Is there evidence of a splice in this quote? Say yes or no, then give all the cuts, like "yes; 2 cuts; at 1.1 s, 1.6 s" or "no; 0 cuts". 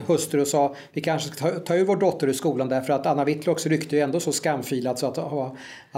no; 0 cuts